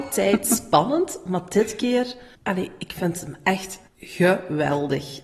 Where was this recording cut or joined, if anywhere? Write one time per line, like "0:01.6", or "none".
0:02.4
0:03.9